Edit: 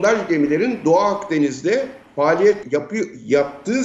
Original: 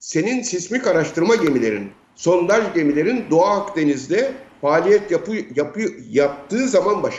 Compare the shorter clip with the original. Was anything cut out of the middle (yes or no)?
yes